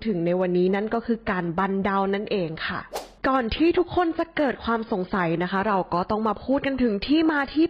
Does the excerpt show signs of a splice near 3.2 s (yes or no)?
yes